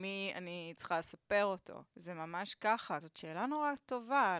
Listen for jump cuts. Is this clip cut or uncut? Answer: cut